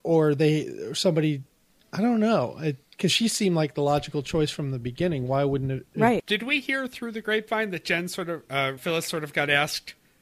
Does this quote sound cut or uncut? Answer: cut